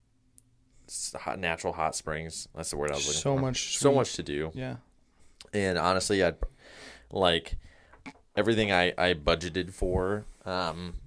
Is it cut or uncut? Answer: uncut